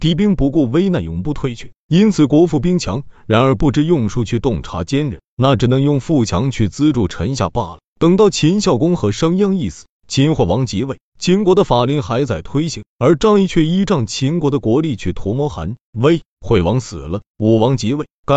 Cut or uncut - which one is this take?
uncut